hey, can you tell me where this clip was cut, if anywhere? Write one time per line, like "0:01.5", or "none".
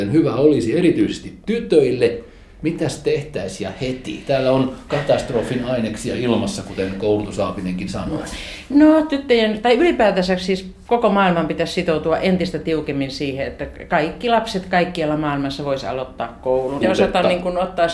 0:16.8